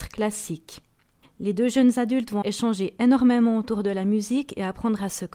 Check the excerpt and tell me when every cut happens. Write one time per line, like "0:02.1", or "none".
0:01.2
0:02.4